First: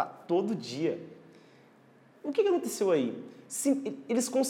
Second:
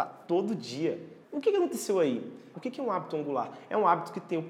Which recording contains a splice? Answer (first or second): second